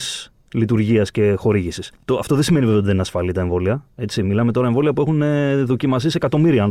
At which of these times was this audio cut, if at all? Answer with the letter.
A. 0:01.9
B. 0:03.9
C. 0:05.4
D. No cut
A